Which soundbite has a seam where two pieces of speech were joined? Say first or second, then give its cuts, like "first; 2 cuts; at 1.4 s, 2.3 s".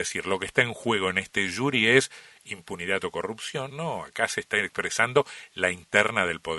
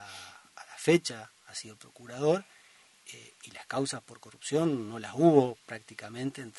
first; 1 cut; at 3.7 s